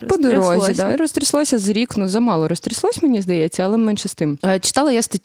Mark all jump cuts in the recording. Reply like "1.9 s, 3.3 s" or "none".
none